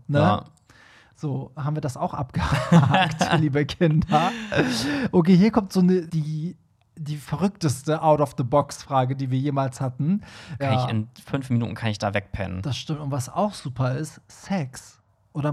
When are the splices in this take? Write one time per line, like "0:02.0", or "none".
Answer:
0:01.6
0:06.1
0:10.6